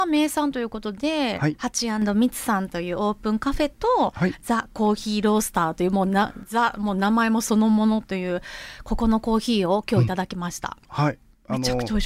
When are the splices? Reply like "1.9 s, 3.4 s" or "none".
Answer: none